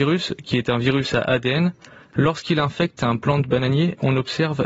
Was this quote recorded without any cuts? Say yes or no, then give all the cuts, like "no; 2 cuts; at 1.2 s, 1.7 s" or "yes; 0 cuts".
yes; 0 cuts